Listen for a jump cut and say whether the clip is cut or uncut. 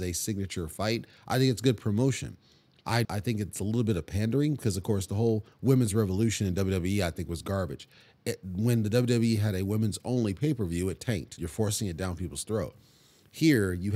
cut